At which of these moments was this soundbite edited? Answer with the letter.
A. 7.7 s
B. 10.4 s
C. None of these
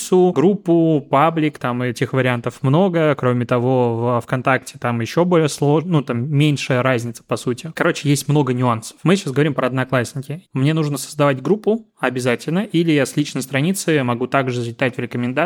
B